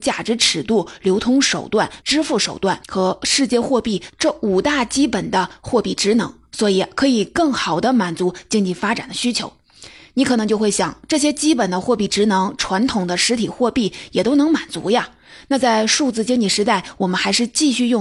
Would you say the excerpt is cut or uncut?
cut